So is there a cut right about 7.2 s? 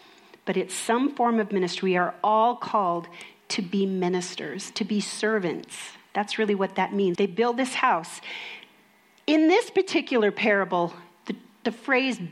yes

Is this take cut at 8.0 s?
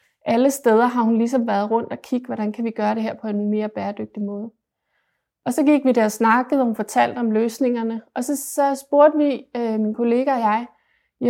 no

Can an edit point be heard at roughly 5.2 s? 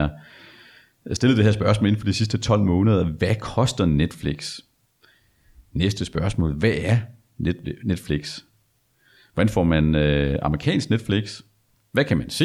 no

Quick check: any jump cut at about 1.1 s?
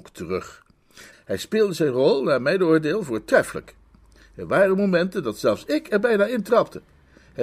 yes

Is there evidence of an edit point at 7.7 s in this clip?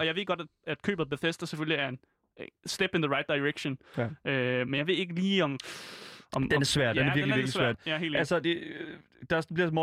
yes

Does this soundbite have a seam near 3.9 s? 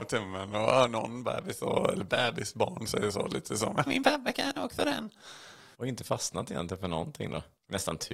yes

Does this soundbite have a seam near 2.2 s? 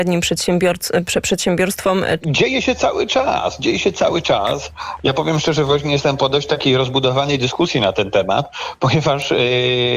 yes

